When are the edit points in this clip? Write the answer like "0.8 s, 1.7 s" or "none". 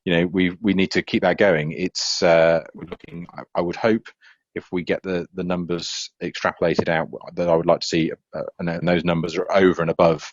6.2 s, 8.8 s